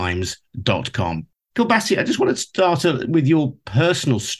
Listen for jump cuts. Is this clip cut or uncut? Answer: cut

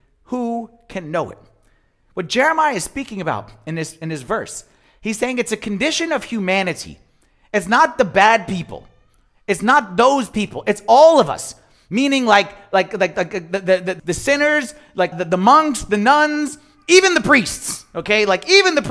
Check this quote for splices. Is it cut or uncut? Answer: cut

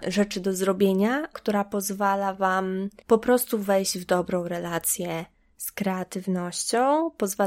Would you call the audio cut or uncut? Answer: cut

